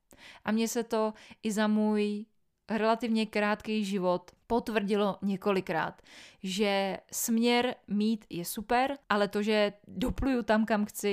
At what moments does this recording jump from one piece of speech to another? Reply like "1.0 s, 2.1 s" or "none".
9.0 s